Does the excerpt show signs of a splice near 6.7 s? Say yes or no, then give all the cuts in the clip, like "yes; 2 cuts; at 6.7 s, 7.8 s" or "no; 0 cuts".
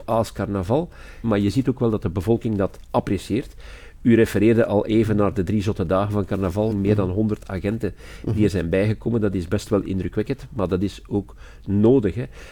yes; 2 cuts; at 1.2 s, 6.7 s